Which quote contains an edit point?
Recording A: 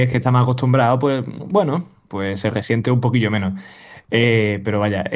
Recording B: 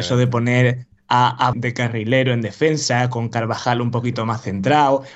B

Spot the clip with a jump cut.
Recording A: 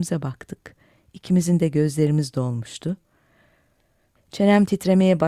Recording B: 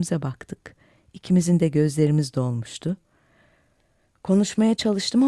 A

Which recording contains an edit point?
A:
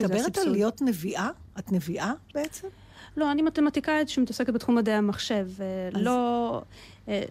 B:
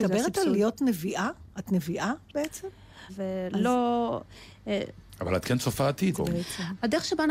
B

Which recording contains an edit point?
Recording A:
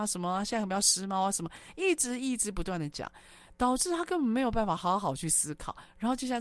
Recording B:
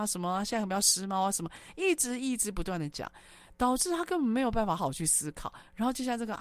B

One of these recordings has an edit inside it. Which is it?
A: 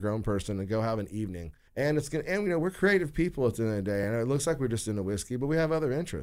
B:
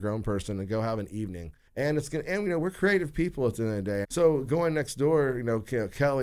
B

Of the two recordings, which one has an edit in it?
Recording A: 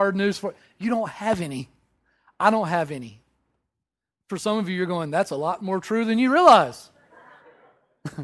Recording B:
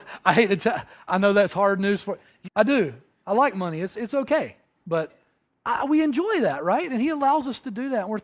B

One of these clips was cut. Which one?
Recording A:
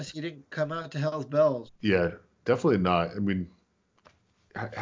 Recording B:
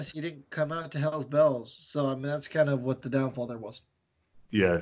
A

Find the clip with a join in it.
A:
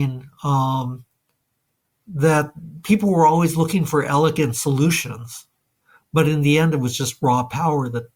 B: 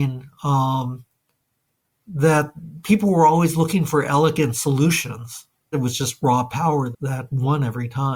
B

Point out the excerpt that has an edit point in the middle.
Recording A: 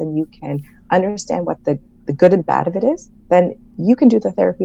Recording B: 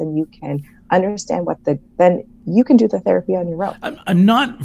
B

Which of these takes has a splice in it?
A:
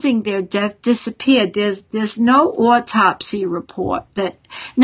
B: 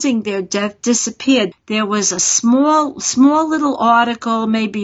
B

